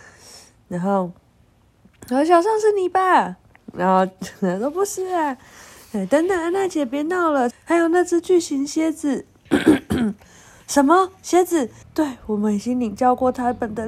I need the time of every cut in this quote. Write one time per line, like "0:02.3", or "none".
0:07.5
0:11.8

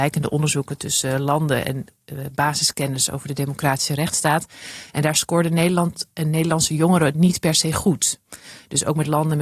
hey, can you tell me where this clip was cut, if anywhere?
none

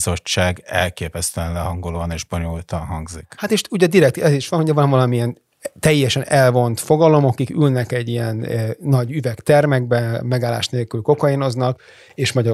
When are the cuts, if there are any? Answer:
none

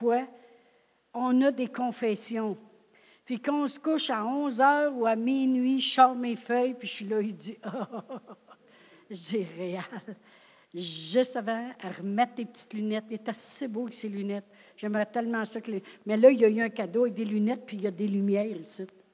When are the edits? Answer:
none

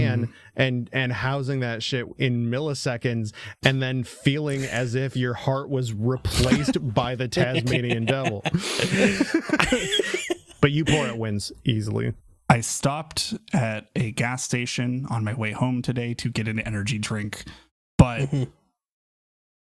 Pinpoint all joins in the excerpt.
none

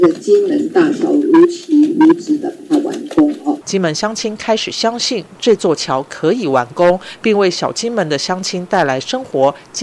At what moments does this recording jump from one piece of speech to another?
0:03.6

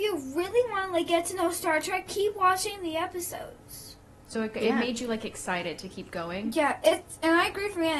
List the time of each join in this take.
none

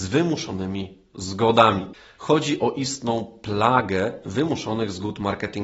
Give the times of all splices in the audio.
0:02.2

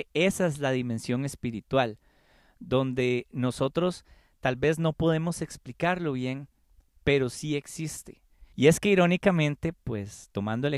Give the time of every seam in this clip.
0:08.5

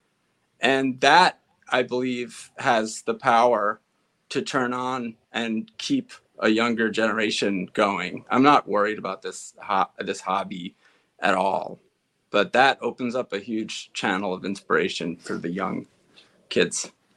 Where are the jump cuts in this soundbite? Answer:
none

